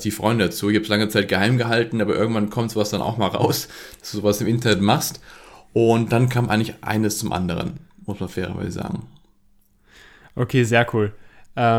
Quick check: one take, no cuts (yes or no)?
yes